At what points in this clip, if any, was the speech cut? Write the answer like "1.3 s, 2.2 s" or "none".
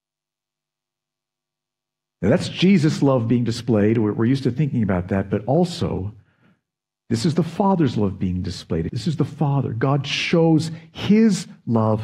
8.9 s